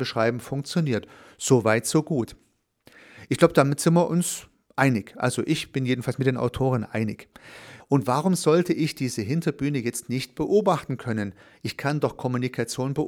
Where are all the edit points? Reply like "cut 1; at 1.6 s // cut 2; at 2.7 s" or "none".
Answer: cut 1; at 7.8 s